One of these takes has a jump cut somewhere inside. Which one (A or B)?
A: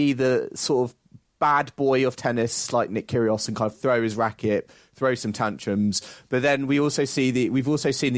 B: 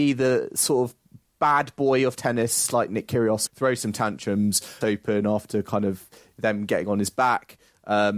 B